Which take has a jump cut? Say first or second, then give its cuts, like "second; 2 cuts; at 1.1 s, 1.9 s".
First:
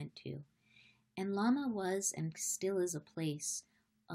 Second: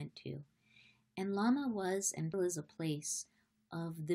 second; 1 cut; at 2.3 s